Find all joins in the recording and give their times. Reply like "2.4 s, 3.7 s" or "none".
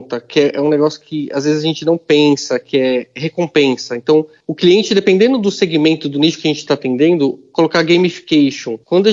none